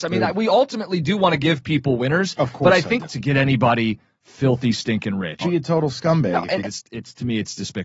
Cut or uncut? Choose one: cut